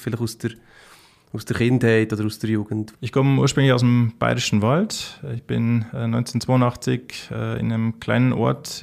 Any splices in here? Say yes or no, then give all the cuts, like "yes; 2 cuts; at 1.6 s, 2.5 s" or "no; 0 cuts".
yes; 1 cut; at 2.9 s